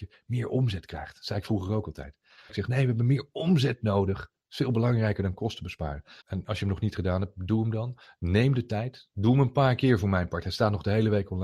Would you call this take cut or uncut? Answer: cut